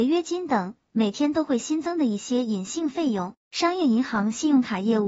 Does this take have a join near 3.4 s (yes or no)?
yes